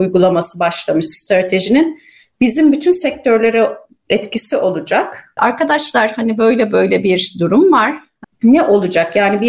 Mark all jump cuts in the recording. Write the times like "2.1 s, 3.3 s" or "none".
5.4 s, 8.2 s